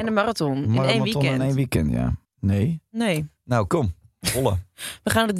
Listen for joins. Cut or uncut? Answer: cut